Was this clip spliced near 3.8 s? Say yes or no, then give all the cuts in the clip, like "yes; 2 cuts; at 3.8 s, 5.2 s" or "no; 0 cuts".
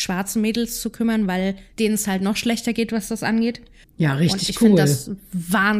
yes; 1 cut; at 3.8 s